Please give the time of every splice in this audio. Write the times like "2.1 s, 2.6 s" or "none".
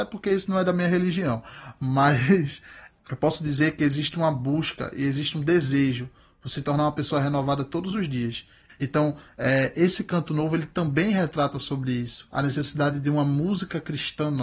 8.7 s